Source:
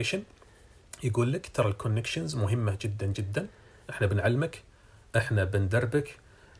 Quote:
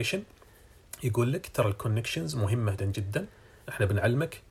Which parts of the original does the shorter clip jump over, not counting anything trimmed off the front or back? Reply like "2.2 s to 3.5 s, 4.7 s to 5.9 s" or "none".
2.8 s to 3.0 s